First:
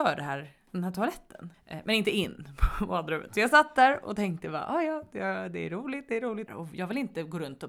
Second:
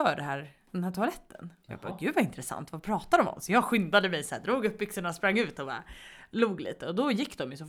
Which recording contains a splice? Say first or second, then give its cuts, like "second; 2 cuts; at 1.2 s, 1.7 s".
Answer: first; 2 cuts; at 1.5 s, 6.5 s